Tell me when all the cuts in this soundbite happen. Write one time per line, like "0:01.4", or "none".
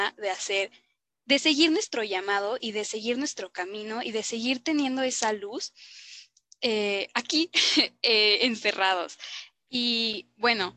0:09.5